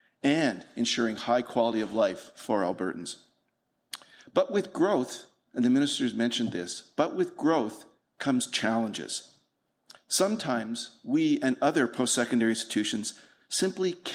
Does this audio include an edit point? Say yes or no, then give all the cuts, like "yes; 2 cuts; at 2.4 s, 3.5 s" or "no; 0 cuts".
no; 0 cuts